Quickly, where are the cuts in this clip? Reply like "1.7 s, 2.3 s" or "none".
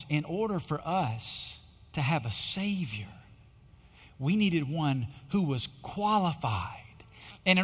none